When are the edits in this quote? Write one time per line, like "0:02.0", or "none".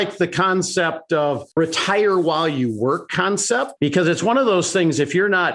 0:01.5
0:03.8